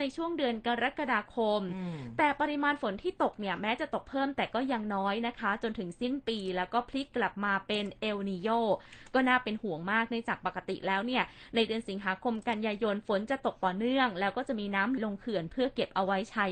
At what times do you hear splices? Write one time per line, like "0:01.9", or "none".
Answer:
0:15.0